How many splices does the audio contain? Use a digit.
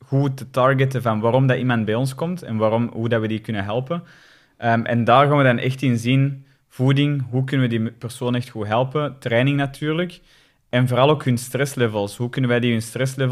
0